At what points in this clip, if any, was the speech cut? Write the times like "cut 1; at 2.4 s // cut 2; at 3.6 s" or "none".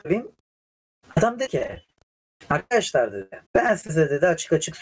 cut 1; at 3.4 s